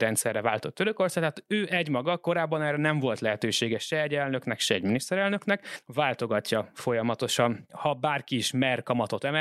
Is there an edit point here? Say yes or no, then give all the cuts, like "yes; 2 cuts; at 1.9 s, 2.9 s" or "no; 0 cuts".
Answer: no; 0 cuts